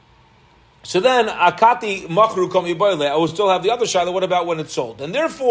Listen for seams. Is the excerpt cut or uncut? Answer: uncut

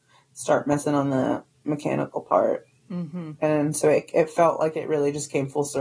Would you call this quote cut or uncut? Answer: uncut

